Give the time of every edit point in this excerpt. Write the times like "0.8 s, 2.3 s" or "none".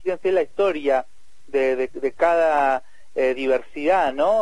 none